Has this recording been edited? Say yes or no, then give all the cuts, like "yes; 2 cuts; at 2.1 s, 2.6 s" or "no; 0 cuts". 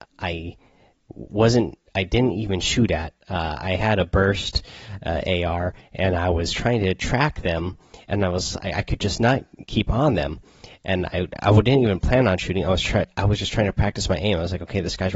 no; 0 cuts